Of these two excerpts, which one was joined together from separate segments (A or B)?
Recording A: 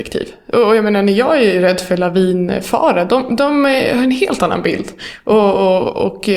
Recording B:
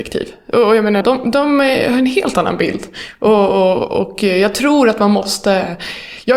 B